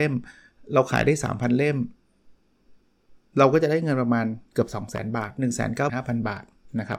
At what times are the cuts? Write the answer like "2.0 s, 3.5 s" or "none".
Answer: 5.9 s